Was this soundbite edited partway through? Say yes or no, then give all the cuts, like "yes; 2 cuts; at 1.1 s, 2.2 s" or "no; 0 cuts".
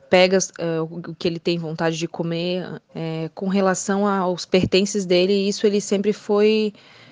yes; 1 cut; at 2.9 s